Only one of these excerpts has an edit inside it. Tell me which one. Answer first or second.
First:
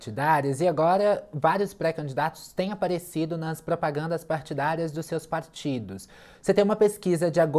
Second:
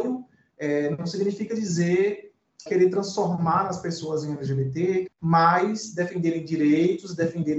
second